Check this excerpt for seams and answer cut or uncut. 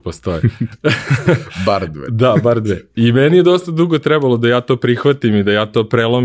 uncut